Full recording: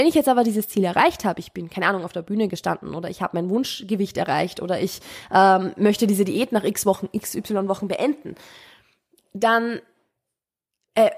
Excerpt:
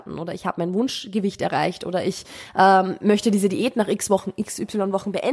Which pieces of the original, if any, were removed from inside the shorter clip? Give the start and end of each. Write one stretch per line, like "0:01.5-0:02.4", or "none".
none